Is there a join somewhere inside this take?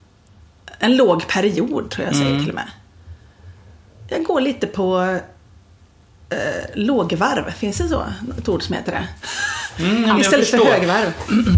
no; 0 cuts

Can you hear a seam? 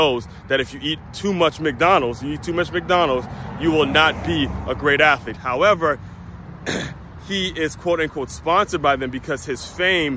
yes; 1 cut; at 5.4 s

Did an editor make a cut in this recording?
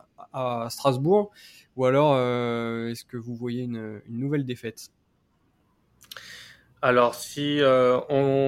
no; 0 cuts

